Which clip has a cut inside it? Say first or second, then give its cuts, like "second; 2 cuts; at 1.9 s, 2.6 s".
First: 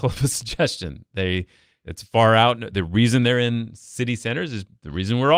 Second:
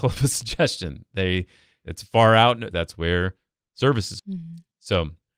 second; 2 cuts; at 2.7 s, 4.2 s